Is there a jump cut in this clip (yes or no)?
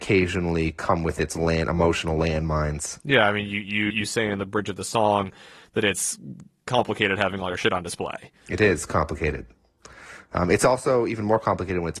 yes